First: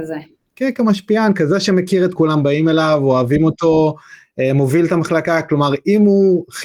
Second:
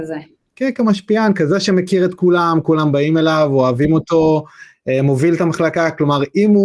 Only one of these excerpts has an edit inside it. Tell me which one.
first; 1 cut; at 2.2 s

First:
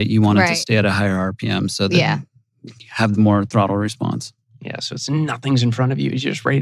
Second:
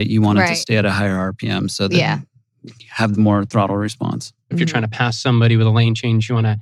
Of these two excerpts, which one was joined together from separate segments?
second; 1 cut; at 4.5 s

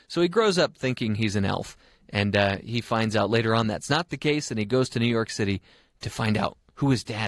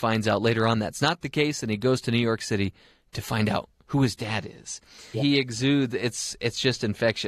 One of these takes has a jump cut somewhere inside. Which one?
second; 1 cut; at 5.1 s

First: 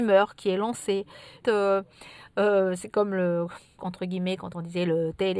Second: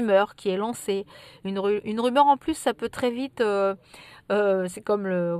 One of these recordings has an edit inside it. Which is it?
first; 2 cuts; at 1.4 s, 3.8 s

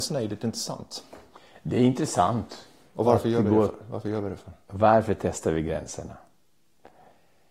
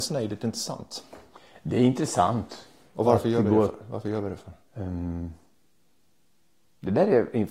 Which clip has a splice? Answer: second; 1 cut; at 4.6 s

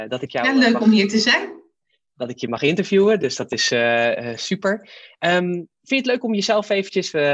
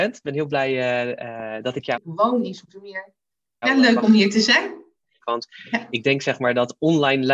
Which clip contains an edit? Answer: second; 3 cuts; at 1.9 s, 3.6 s, 5.2 s

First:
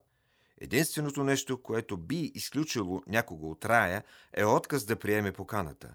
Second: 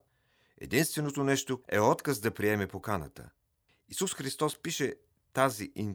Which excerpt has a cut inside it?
second; 1 cut; at 1.6 s

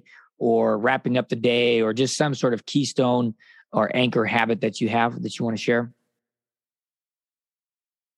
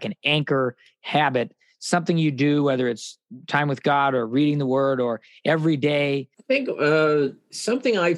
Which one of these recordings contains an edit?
second; 1 cut; at 6.3 s

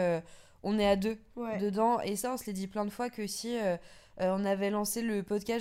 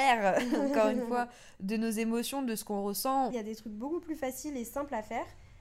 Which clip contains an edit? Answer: second; 1 cut; at 3.3 s

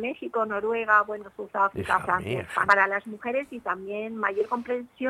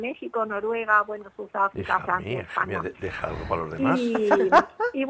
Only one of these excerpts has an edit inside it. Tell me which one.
first; 1 cut; at 2.7 s

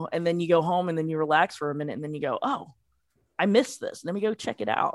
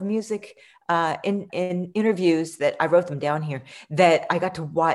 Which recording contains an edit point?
second; 1 cut; at 1.5 s

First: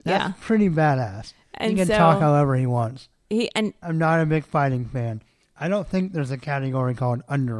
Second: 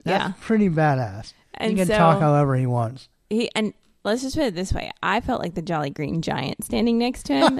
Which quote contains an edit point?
first; 1 cut; at 3.8 s

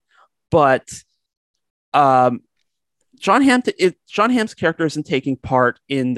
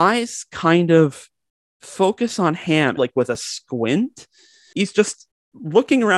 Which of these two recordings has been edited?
second; 2 cuts; at 3.0 s, 4.7 s

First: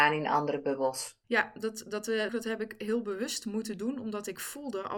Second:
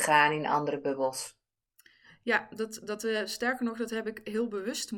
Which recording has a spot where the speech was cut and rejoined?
first; 2 cuts; at 1.2 s, 2.3 s

